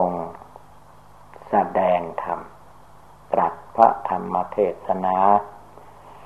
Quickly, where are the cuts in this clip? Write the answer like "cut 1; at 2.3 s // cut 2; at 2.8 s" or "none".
none